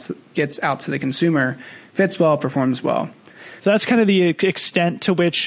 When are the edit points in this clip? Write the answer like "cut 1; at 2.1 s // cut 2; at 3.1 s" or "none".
cut 1; at 3.6 s